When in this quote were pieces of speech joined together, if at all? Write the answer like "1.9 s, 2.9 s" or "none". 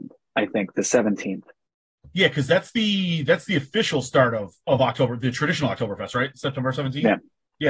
none